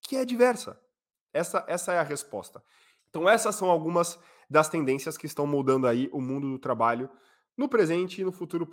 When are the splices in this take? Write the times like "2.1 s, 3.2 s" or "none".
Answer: 3.0 s